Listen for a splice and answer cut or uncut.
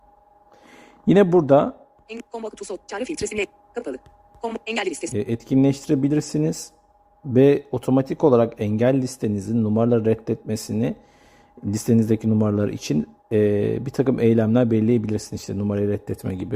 cut